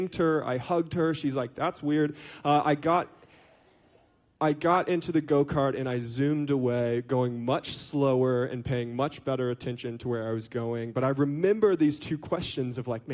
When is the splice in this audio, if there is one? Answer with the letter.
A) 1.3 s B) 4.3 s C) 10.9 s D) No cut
D